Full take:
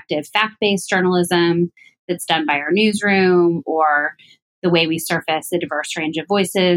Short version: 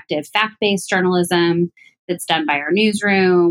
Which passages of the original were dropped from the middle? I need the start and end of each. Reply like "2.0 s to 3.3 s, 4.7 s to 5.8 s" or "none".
none